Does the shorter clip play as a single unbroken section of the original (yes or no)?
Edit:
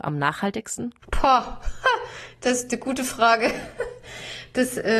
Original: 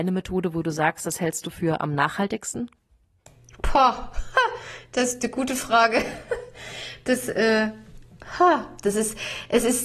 no